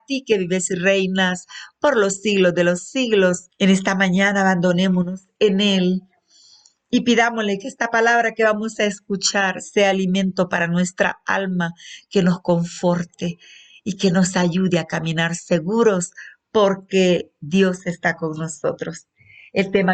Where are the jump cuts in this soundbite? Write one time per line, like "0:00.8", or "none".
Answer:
0:03.5